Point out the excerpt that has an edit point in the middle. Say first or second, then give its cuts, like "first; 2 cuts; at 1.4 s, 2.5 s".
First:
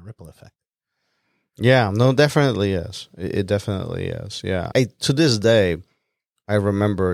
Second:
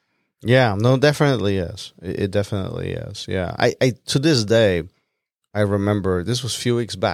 first; 1 cut; at 4.7 s